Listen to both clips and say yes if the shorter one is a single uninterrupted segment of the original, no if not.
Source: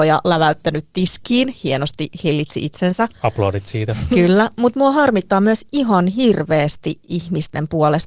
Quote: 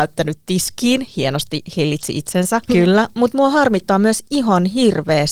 no